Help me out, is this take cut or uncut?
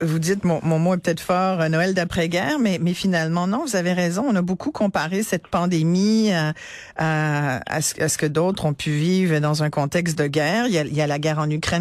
uncut